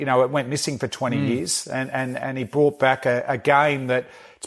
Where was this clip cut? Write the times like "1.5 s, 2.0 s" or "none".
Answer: none